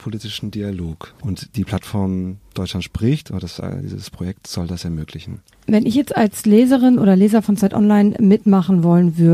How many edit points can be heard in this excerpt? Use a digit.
1